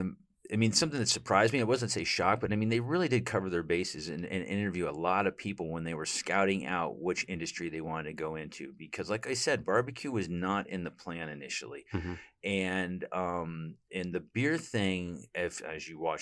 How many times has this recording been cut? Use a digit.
0